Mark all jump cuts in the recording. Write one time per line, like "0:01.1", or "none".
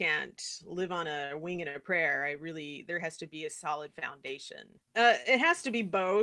0:04.8